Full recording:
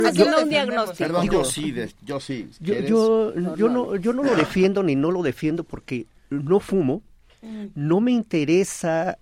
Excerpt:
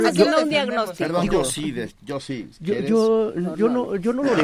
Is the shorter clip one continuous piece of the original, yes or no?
yes